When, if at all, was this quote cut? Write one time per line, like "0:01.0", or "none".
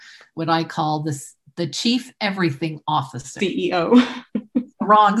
0:03.4